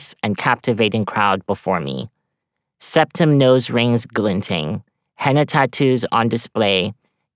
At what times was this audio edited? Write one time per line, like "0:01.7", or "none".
none